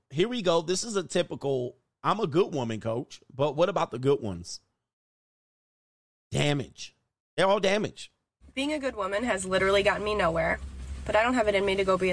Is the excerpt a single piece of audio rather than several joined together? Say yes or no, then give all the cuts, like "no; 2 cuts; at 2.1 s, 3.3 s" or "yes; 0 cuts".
no; 1 cut; at 8.4 s